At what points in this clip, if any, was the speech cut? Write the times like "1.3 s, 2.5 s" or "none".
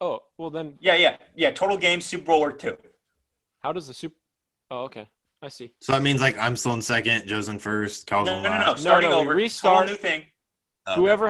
none